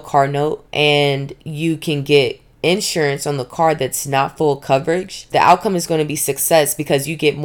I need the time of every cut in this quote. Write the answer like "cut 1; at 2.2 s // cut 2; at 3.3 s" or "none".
cut 1; at 5.3 s